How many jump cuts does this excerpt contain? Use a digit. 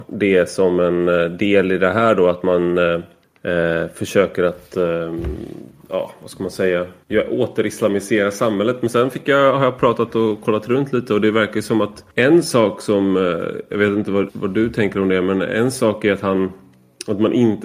1